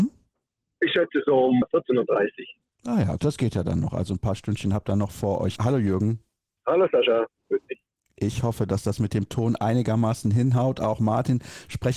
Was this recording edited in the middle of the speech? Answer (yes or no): yes